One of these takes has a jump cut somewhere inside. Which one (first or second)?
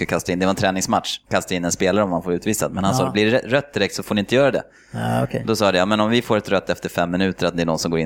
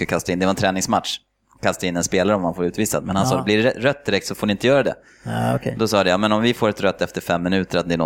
first